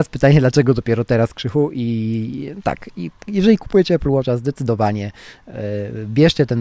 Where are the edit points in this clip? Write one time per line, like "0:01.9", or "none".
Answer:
none